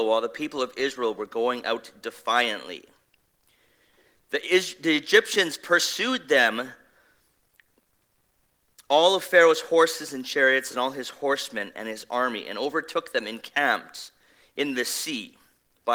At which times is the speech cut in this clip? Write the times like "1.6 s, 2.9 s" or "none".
none